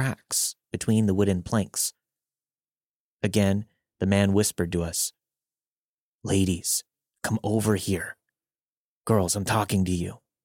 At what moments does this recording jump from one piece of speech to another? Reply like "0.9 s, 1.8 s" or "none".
none